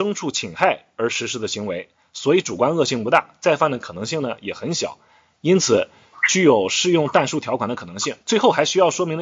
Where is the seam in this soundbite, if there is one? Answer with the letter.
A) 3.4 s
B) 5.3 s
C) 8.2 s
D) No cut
C